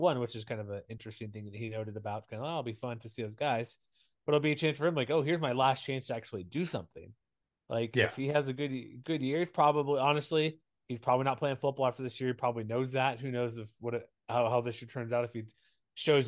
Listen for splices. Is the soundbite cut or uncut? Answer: uncut